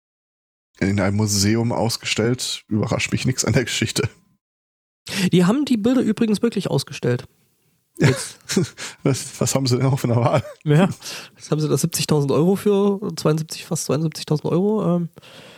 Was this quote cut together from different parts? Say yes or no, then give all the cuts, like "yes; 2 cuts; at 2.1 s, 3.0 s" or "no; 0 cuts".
no; 0 cuts